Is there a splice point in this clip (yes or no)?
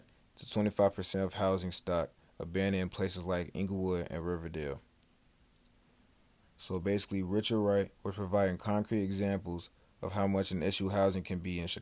yes